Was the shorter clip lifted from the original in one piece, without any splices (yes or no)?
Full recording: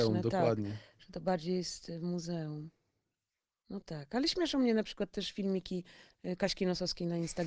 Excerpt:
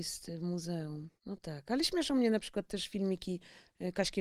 no